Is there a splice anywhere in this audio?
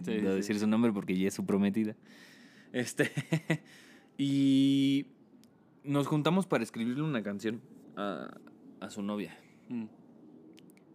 no; 0 cuts

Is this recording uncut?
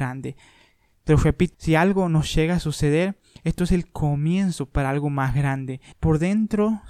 no; 2 cuts; at 1.5 s, 5.9 s

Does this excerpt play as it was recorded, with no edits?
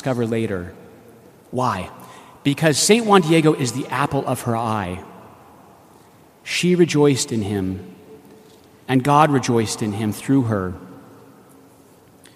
yes; 0 cuts

